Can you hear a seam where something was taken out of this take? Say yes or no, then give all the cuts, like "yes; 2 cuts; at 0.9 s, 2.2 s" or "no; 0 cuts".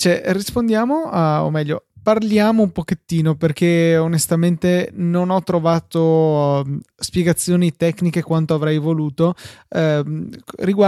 no; 0 cuts